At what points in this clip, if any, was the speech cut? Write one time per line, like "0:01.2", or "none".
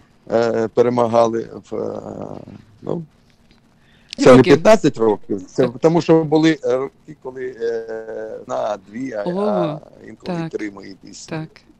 0:04.2
0:08.5